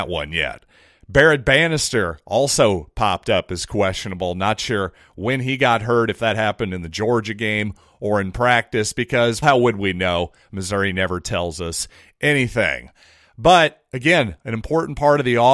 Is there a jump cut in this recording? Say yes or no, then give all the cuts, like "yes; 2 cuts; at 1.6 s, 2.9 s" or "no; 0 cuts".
yes; 1 cut; at 9.4 s